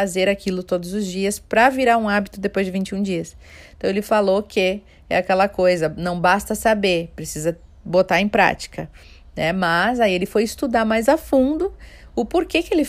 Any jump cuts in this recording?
no; 0 cuts

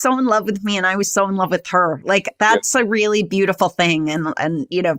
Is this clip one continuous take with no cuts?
yes; 0 cuts

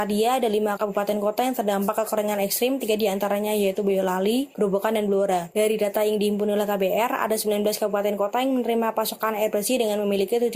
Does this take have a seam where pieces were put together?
no; 0 cuts

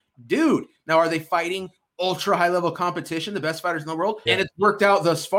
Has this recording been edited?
yes; 1 cut; at 4.3 s

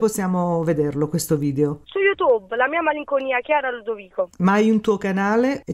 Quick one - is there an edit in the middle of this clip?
no; 0 cuts

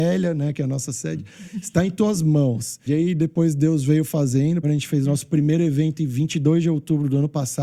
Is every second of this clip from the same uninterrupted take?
no; 2 cuts; at 2.9 s, 4.6 s

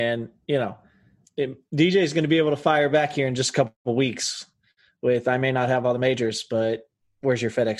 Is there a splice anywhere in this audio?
yes; 1 cut; at 1.2 s

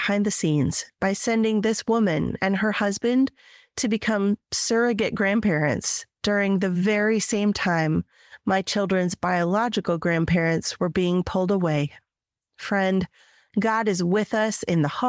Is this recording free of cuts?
yes; 0 cuts

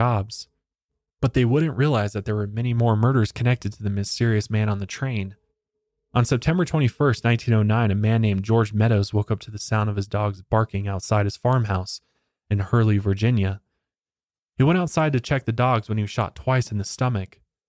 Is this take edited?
no; 0 cuts

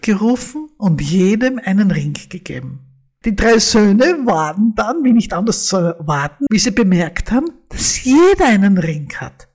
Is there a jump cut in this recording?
yes; 2 cuts; at 3.2 s, 6.5 s

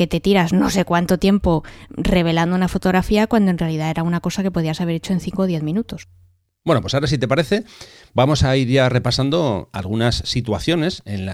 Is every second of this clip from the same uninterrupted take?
yes; 0 cuts

